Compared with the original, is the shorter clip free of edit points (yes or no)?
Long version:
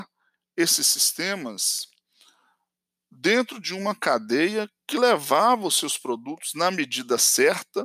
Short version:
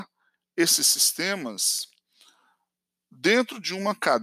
yes